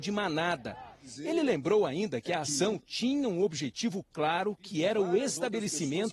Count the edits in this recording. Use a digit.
0